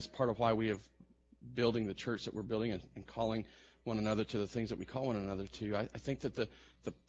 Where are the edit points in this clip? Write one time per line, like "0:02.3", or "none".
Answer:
none